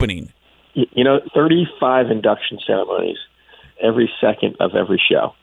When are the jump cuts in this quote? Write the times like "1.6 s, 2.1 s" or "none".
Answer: 1.2 s, 3.7 s

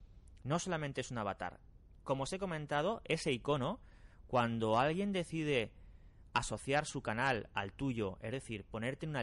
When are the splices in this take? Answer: none

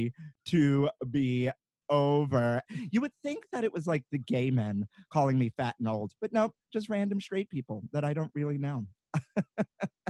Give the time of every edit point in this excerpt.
2.7 s

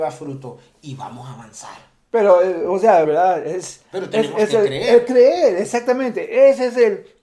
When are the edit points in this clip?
3.0 s

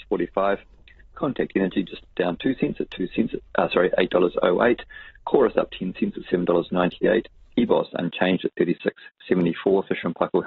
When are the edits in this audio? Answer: none

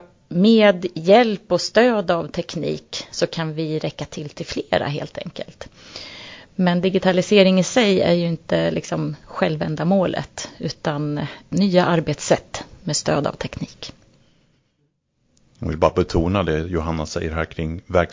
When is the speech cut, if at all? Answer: none

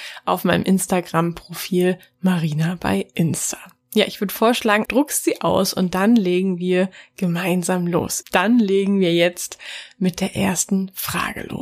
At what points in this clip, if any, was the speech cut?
4.9 s, 8.2 s

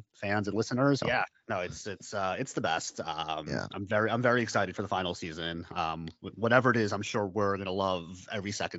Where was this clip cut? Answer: 1.0 s

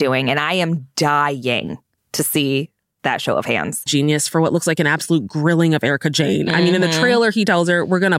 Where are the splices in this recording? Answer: 3.9 s

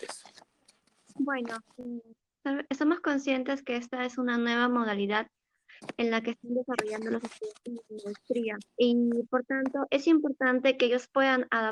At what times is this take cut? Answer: 8.7 s

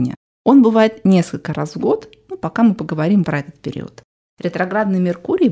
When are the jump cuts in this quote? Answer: 3.2 s

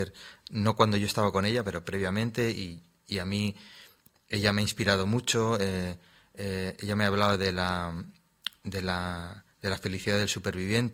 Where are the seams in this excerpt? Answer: none

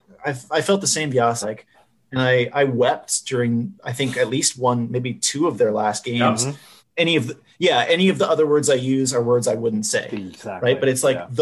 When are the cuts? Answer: 1.4 s, 6.8 s

